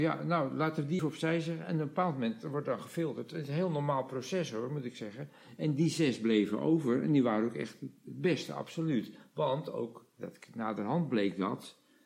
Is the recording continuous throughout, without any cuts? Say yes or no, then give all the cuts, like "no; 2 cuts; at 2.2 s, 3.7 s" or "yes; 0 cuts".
no; 1 cut; at 1.0 s